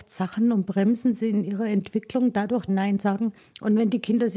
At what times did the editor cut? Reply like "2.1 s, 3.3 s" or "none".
2.7 s